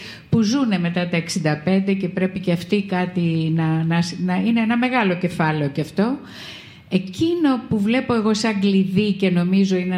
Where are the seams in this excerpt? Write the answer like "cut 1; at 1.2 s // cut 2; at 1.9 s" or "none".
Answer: none